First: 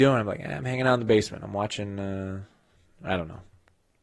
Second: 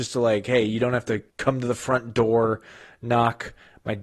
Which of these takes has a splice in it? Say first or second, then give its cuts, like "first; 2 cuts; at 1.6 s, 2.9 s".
second; 1 cut; at 1.3 s